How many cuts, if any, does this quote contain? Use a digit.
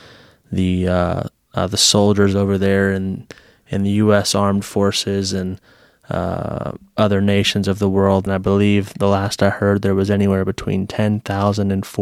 1